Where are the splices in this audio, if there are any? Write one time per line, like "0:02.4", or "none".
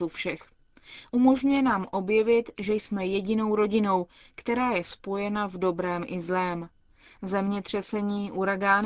none